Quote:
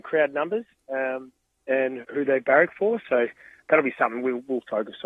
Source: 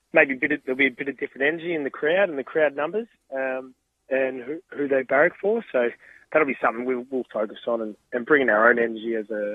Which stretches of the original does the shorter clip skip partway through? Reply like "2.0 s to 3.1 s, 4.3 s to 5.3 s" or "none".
4.4 s to 4.6 s